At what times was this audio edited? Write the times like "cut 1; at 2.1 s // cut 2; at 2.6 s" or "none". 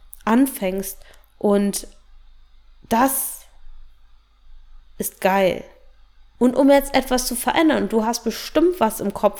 cut 1; at 6.4 s